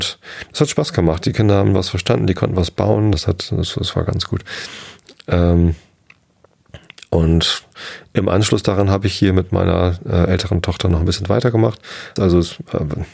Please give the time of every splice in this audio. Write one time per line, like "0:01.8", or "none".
0:03.1
0:12.2